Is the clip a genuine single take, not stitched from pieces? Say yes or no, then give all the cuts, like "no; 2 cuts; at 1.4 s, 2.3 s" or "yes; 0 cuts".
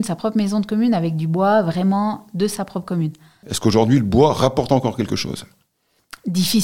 no; 1 cut; at 3.4 s